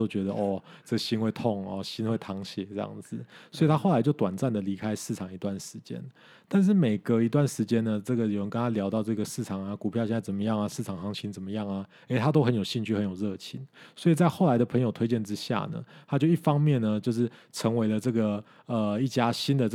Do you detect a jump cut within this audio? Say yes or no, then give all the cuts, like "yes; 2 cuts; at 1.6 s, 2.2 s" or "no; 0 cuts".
no; 0 cuts